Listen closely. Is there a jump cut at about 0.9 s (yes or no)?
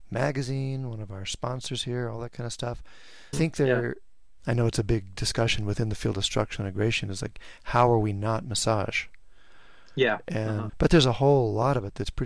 no